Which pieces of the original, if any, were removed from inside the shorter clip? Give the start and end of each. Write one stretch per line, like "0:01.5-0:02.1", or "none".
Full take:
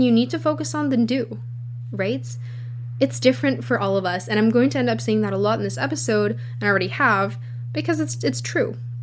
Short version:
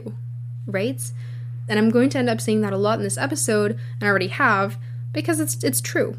0:02.9-0:04.3